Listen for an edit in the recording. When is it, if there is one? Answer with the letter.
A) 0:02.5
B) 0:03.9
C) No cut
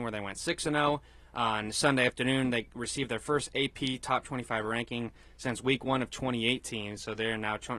C